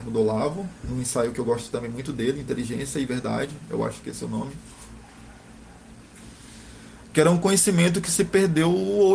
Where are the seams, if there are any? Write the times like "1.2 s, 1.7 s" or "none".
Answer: 7.0 s